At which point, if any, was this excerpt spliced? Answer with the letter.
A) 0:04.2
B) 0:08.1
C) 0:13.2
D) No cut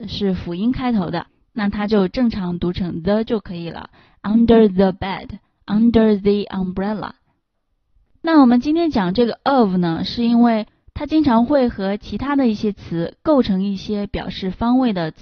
B